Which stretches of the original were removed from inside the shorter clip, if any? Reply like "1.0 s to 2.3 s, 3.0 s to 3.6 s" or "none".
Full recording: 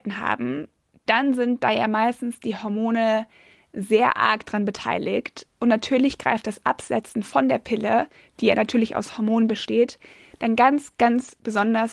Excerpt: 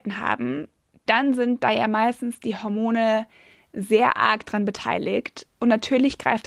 none